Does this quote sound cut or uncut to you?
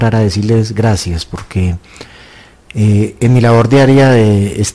uncut